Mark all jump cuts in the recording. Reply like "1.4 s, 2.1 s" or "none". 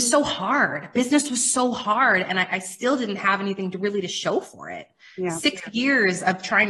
none

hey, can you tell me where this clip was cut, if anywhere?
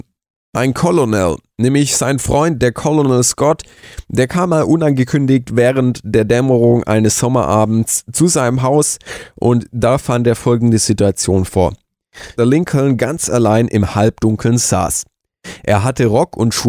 12.4 s

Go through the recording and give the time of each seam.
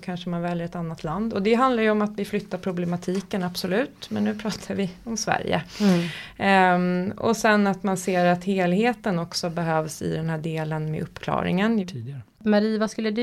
11.8 s

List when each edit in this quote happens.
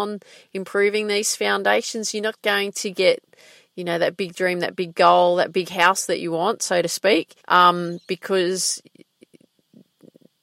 7.4 s

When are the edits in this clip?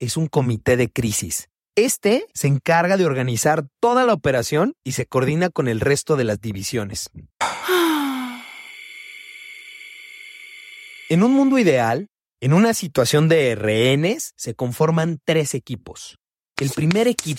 7.4 s

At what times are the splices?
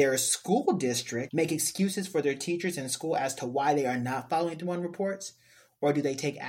1.3 s

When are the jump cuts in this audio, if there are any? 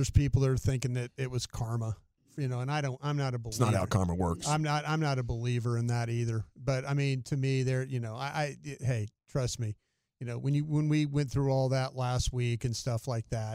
none

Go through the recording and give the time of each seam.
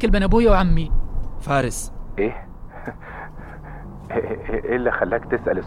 4.6 s

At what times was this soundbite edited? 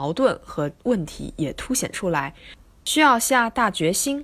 none

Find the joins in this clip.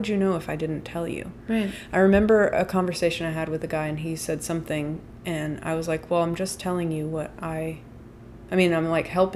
none

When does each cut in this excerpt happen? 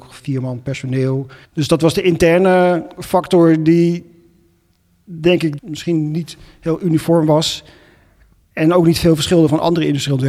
1.4 s, 5.6 s

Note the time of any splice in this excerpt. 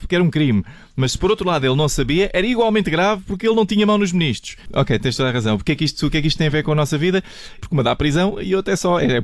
4.7 s, 7.6 s

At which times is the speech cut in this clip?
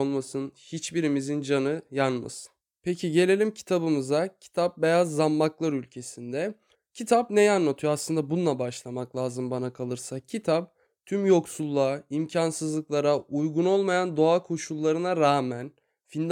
none

